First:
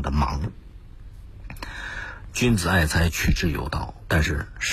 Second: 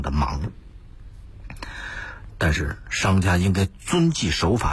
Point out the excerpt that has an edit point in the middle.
second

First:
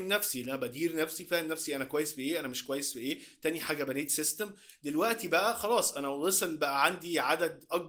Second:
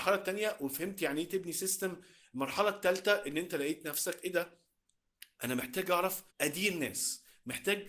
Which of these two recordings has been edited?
second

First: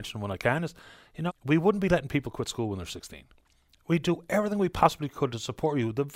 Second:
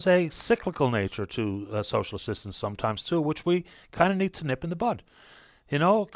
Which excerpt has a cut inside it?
first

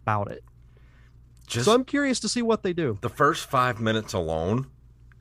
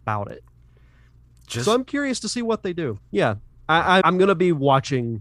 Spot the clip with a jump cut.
second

